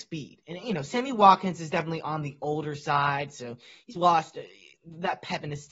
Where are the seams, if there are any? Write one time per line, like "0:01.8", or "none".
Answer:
0:04.0